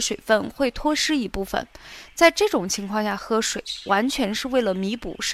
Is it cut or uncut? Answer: uncut